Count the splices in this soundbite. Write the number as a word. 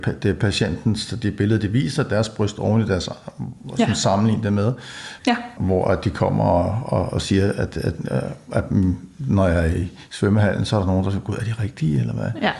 one